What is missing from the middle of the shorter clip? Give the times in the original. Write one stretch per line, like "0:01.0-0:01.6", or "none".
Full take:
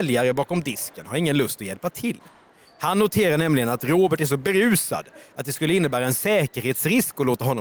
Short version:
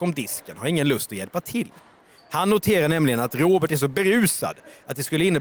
none